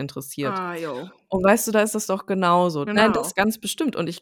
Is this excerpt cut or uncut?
cut